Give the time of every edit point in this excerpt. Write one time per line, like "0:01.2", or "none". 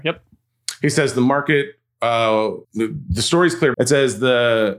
0:02.6
0:03.7